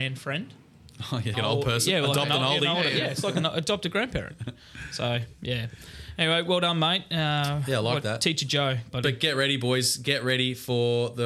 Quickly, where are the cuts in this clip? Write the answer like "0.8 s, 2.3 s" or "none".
1.3 s, 8.9 s